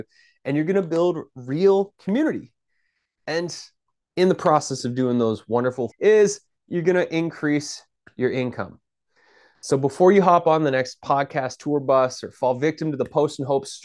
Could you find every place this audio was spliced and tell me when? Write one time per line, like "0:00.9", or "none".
0:05.9